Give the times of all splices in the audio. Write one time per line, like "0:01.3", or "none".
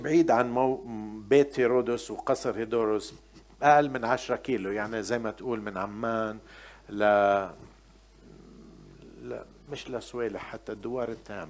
0:09.7